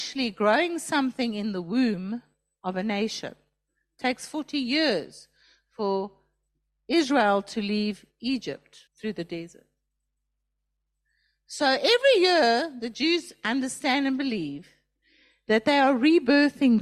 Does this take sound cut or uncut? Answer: cut